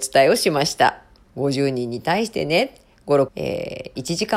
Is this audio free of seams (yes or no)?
no